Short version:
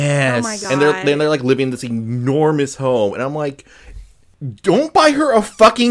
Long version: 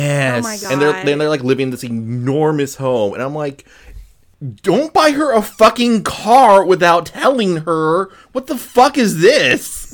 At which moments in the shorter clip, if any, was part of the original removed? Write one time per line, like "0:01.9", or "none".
none